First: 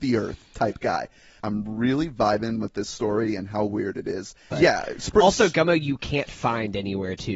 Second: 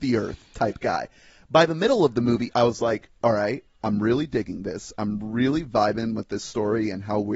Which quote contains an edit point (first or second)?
first